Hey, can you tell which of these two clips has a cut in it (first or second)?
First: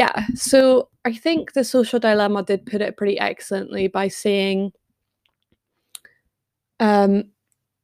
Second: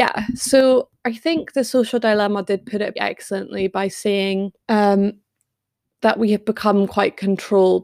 second